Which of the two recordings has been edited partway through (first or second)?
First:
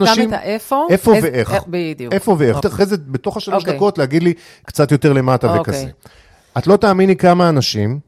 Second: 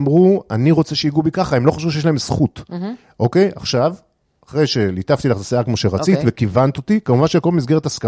first